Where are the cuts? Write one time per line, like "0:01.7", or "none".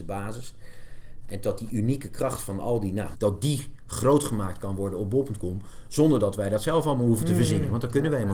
0:01.2
0:03.1